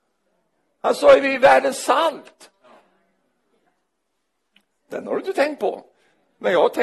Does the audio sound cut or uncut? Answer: uncut